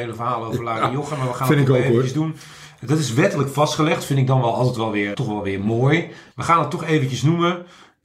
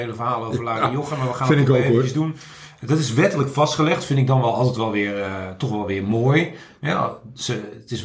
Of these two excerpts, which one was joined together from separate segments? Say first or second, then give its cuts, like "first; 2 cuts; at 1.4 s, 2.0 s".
first; 2 cuts; at 5.1 s, 6.3 s